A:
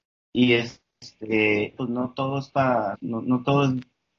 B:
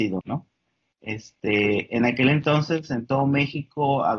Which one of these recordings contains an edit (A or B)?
A